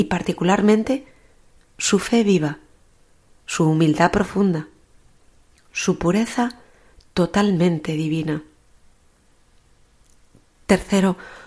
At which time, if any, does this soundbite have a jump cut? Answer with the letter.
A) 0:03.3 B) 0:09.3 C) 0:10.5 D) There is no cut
D